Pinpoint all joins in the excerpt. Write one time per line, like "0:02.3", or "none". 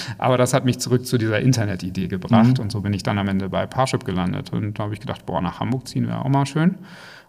0:04.5